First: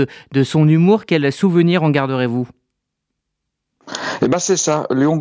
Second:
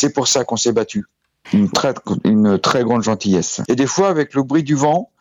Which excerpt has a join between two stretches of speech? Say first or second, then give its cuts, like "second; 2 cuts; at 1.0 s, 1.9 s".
second; 2 cuts; at 1.4 s, 3.6 s